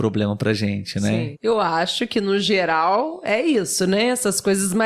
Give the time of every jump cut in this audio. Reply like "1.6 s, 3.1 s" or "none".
1.3 s